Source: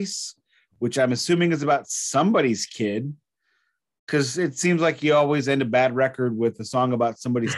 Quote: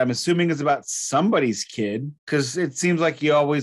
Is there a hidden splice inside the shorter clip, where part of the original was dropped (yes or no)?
yes